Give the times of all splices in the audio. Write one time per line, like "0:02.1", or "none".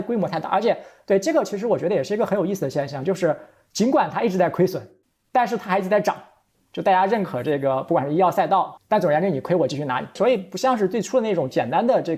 0:06.5
0:08.8
0:10.2

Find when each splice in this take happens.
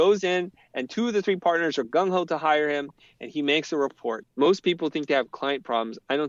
0:04.2

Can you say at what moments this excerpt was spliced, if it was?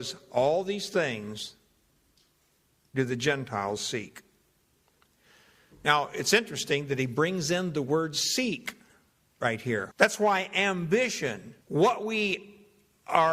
0:09.9
0:11.6

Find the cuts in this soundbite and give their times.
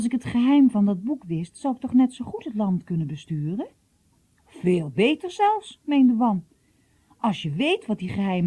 none

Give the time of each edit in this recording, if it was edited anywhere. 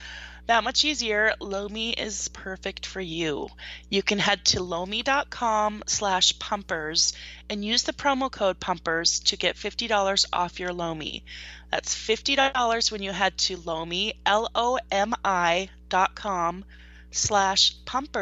none

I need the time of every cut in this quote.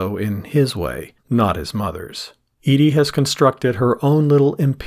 0:01.2
0:02.6

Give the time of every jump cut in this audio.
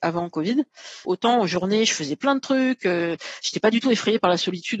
0:01.0

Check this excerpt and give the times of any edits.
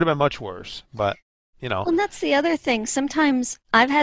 none

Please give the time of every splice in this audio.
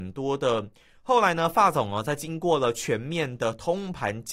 0:00.9

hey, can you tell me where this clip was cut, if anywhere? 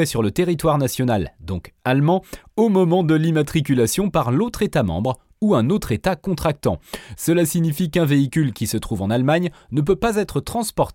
0:07.1

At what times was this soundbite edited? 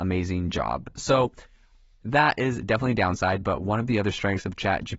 none

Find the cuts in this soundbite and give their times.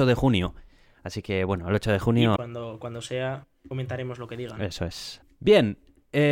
0:02.4
0:05.2

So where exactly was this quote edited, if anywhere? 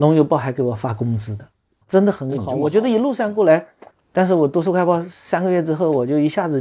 0:01.8
0:03.9

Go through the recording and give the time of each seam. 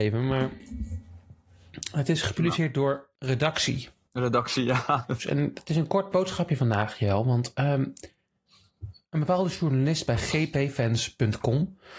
0:03.1
0:05.2

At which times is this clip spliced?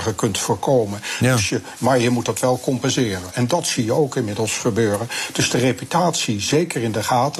0:01.8
0:03.3

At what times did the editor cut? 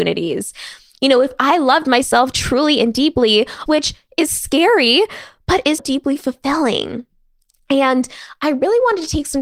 0:03.7
0:05.8

